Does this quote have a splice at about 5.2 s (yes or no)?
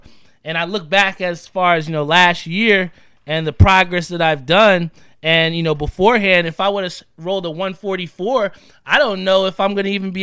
no